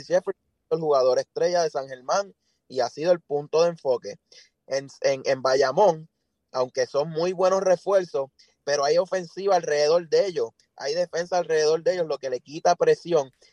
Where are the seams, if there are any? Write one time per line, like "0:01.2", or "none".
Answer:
none